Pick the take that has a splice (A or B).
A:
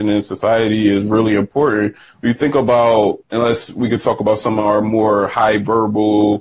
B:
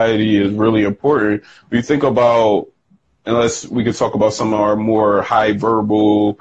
A